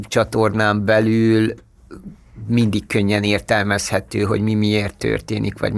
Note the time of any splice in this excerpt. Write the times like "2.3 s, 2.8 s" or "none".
none